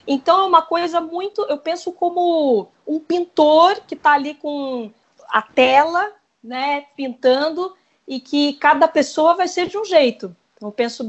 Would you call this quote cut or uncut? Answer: uncut